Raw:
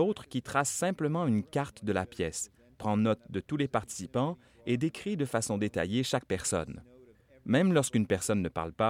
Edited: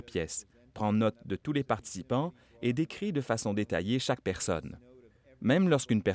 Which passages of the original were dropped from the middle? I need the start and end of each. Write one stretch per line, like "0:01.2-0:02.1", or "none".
none